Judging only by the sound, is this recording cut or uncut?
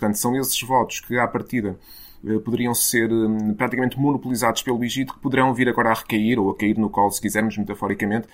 uncut